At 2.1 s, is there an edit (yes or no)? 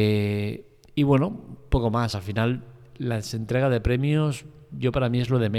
no